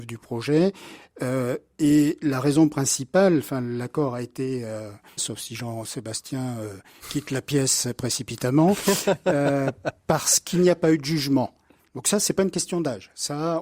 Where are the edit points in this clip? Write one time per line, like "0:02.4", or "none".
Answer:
0:05.2
0:11.8

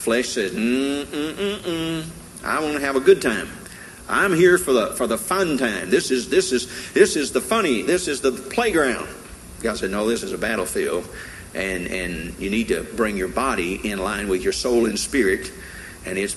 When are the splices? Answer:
none

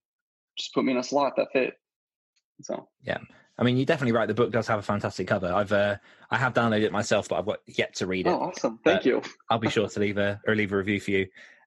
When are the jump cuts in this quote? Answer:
0:02.9
0:10.4

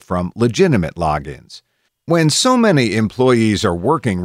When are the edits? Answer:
0:01.9

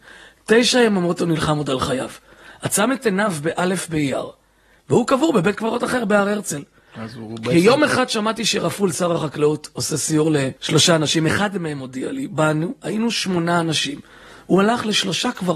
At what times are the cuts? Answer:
0:10.6

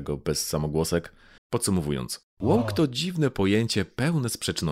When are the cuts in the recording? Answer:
0:01.4

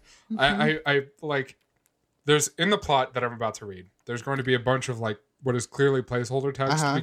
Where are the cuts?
none

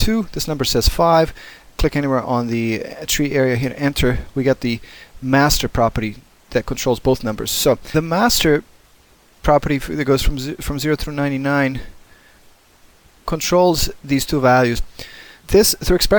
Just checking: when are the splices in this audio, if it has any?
0:01.8
0:14.8

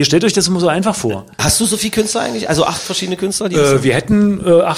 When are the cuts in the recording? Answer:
0:01.4

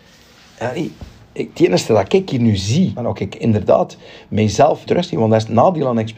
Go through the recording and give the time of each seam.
0:03.0
0:04.9

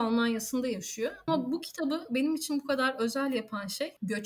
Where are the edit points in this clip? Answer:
0:01.3

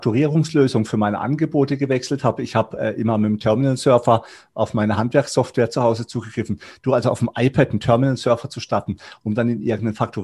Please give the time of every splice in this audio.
none

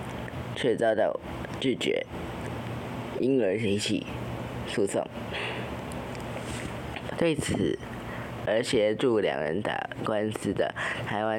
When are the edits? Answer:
0:07.1
0:08.4

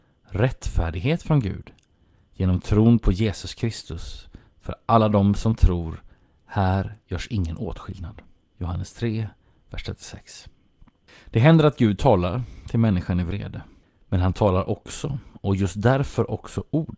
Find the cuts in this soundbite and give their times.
0:08.4

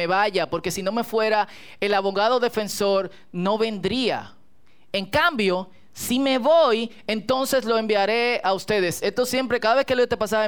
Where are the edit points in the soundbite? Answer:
none

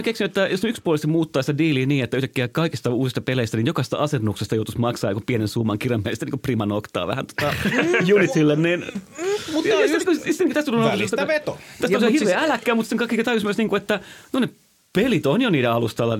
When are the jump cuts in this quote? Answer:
none

